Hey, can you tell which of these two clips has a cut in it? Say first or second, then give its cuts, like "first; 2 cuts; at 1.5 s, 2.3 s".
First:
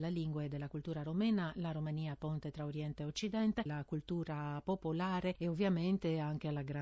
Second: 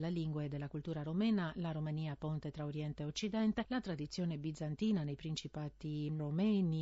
first; 1 cut; at 3.7 s